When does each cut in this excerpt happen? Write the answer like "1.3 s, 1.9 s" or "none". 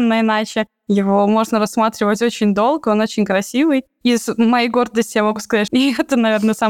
5.7 s